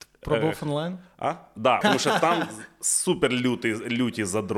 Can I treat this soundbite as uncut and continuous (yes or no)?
no